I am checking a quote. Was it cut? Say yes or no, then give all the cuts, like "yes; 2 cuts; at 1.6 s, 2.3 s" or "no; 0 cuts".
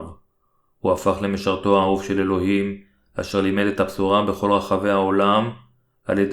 no; 0 cuts